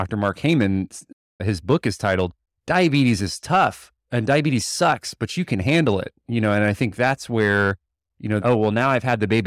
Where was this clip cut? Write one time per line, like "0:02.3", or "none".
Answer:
0:04.0
0:08.4